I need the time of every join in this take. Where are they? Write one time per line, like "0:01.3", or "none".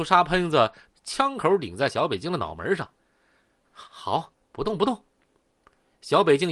0:00.9